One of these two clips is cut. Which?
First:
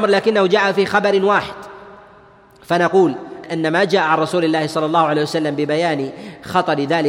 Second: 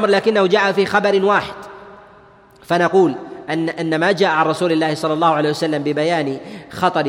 first; 1 cut; at 3.4 s

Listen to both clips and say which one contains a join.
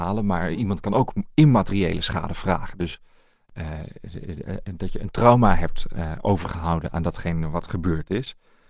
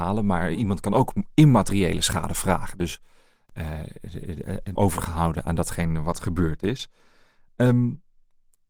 second; 1 cut; at 4.8 s

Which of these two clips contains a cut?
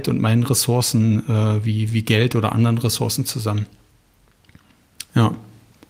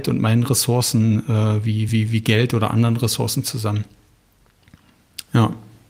first; 1 cut; at 1.9 s

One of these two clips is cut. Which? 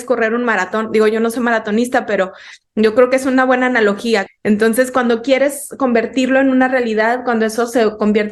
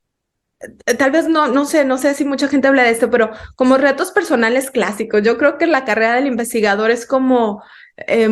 first; 1 cut; at 4.3 s

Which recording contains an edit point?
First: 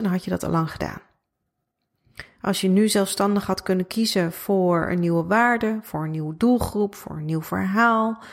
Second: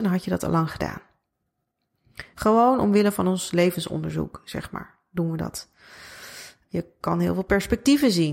second; 2 cuts; at 2.3 s, 6.7 s

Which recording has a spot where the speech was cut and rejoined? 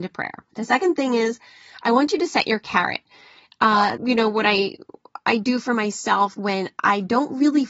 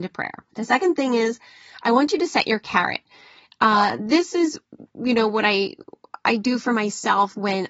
first; 1 cut; at 4.0 s

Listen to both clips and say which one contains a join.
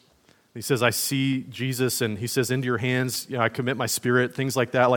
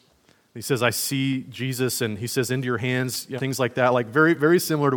second; 1 cut; at 3.4 s

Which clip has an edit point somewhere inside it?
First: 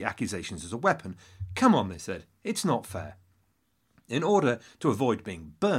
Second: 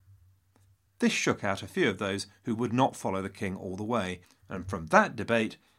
second; 1 cut; at 4.2 s

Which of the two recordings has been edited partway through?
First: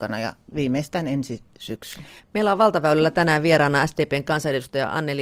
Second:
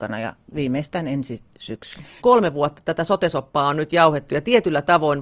second; 1 cut; at 2.2 s

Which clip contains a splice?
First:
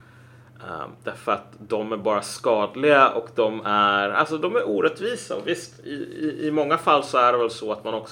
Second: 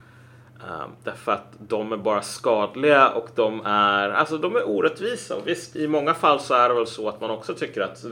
second; 1 cut; at 5.8 s

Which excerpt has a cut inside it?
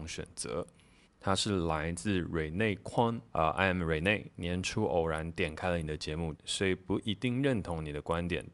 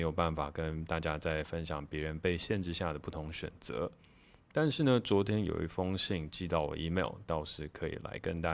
first; 3 cuts; at 1.1 s, 3.3 s, 6.4 s

